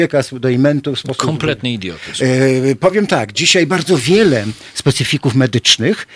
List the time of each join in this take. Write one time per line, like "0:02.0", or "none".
none